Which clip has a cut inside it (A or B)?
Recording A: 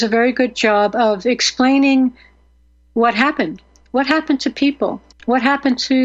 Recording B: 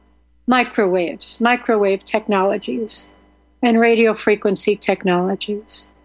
A